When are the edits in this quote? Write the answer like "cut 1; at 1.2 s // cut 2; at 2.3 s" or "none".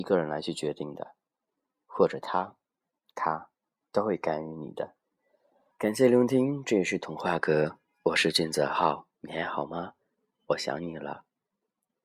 cut 1; at 5.7 s // cut 2; at 9.1 s